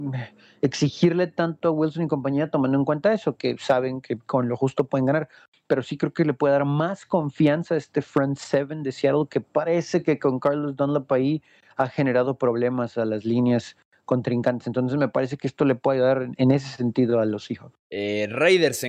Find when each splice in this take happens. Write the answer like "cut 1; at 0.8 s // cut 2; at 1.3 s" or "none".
cut 1; at 17.8 s